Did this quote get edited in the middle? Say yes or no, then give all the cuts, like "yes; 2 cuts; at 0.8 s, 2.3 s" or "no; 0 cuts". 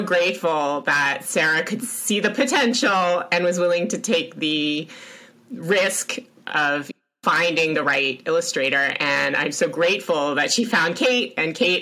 no; 0 cuts